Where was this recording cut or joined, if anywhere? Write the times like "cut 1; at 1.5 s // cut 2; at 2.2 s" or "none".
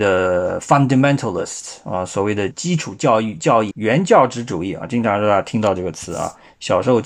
cut 1; at 2.5 s // cut 2; at 3.7 s